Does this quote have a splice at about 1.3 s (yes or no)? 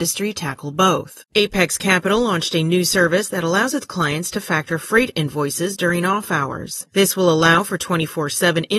yes